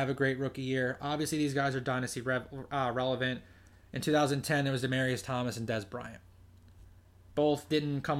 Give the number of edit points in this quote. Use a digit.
0